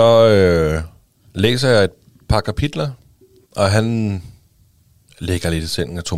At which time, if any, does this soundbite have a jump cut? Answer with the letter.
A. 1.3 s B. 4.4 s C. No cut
C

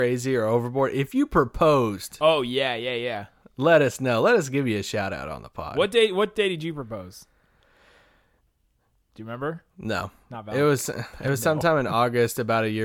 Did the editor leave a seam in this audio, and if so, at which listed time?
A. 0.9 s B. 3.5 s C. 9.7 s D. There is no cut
C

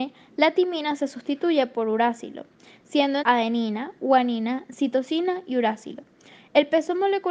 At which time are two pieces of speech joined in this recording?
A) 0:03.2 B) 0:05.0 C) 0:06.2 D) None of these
A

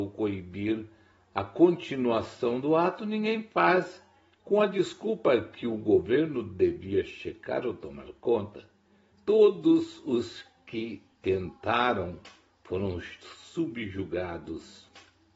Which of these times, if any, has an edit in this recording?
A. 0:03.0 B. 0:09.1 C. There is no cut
B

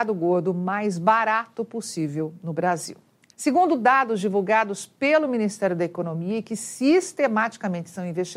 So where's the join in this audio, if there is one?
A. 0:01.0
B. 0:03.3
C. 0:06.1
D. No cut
B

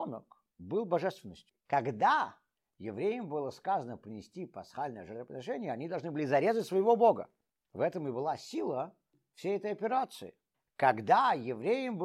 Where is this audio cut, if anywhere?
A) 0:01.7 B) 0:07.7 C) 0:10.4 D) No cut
A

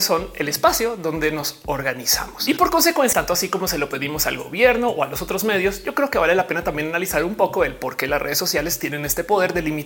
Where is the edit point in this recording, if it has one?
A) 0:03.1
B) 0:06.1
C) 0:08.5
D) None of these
A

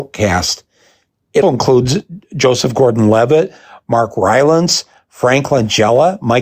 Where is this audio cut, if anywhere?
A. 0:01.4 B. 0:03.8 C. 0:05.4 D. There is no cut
A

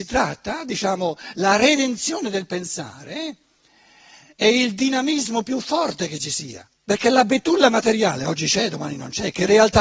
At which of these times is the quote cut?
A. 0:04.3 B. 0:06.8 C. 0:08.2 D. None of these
B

